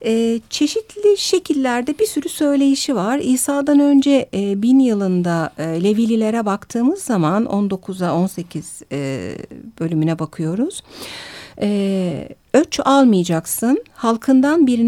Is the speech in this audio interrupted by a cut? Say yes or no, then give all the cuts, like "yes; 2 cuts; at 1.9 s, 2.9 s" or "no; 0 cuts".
no; 0 cuts